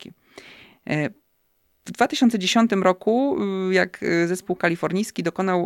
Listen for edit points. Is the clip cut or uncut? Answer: uncut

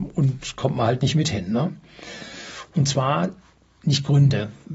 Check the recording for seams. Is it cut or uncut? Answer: cut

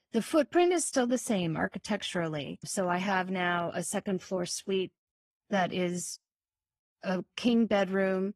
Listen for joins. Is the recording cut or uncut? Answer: cut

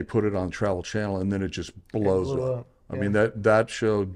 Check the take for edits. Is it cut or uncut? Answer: uncut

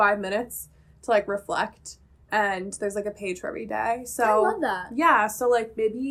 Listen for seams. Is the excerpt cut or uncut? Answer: uncut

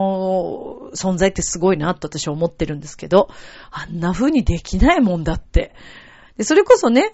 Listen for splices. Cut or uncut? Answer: cut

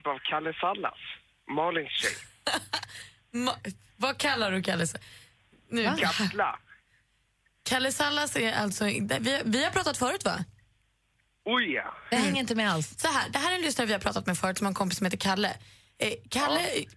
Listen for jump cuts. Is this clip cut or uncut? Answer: uncut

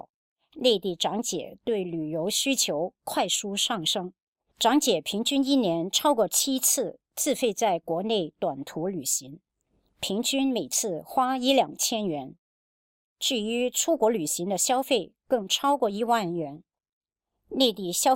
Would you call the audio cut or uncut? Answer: uncut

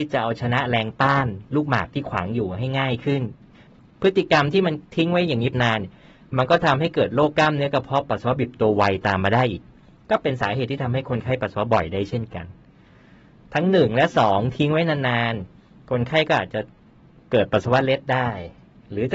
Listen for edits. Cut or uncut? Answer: cut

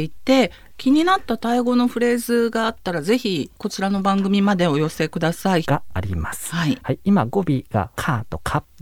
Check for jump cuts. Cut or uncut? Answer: cut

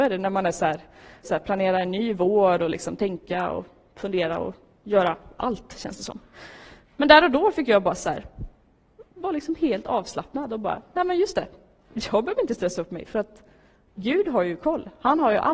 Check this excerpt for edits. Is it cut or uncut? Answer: cut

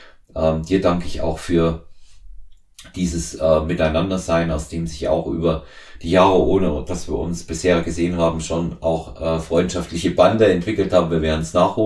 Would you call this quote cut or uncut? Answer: uncut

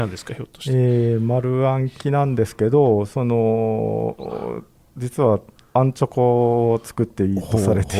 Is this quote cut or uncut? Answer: uncut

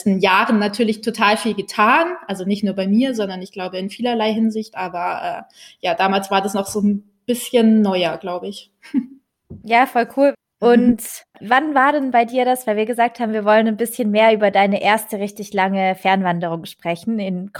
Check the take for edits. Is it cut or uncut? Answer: uncut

